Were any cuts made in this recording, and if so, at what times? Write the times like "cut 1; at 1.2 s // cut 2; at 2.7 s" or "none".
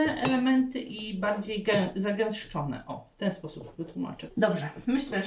cut 1; at 4.3 s